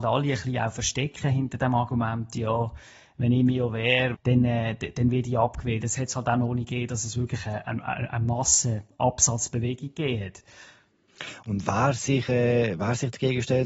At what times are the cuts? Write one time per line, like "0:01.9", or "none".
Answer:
0:04.1